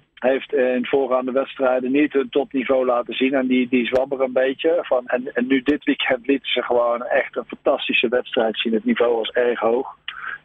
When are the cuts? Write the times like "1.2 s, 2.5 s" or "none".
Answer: 5.1 s